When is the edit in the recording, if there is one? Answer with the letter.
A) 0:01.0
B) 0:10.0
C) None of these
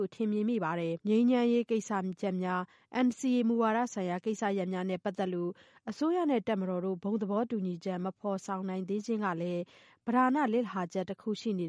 A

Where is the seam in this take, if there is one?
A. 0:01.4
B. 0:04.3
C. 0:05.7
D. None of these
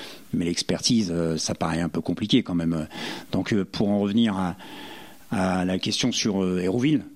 A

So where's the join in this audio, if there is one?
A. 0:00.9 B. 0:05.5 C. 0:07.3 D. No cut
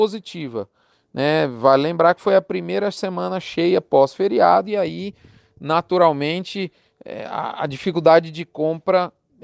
A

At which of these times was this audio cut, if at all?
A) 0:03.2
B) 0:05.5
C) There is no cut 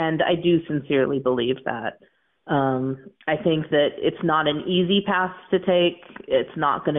A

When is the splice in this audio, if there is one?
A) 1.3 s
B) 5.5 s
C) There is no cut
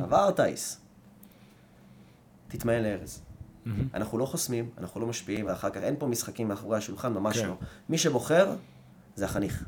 B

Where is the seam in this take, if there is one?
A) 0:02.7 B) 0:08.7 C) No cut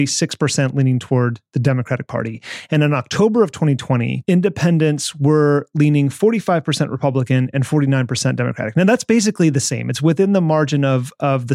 C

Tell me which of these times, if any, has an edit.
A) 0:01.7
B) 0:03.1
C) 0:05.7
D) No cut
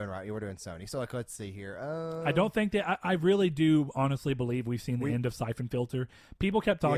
D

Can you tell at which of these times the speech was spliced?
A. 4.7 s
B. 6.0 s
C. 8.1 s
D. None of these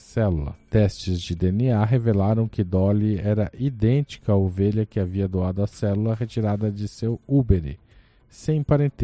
D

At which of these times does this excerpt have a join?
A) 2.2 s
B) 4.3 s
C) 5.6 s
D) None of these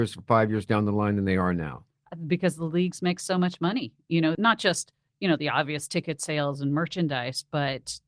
B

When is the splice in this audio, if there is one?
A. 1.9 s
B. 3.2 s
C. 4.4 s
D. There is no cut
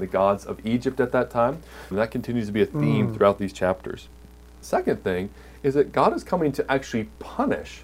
A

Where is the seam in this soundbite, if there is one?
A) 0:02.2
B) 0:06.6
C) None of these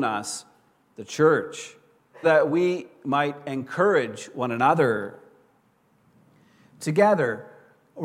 A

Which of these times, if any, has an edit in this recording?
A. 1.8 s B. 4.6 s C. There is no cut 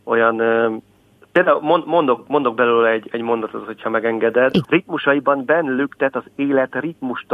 B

